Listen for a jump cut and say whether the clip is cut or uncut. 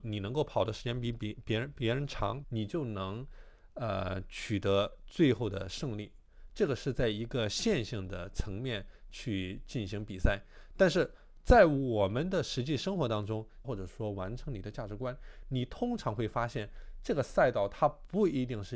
cut